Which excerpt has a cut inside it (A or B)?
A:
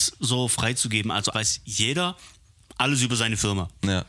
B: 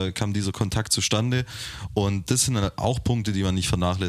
A